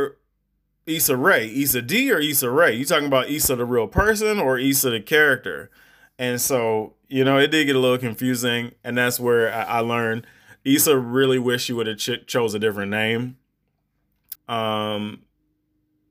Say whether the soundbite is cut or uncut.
cut